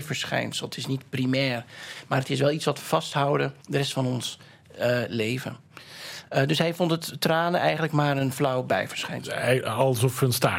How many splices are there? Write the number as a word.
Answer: one